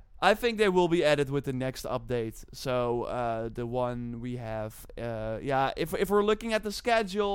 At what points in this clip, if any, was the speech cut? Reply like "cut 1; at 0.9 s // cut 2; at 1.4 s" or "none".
none